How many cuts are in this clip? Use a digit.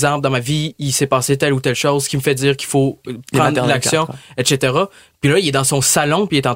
0